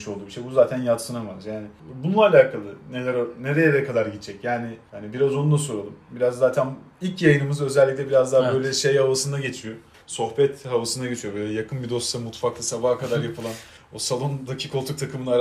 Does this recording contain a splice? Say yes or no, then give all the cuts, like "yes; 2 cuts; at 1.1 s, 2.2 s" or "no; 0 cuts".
no; 0 cuts